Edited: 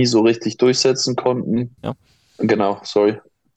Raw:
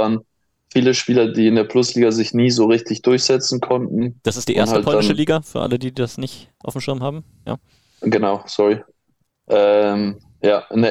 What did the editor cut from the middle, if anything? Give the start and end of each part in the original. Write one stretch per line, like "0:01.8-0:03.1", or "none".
0:04.2-0:07.4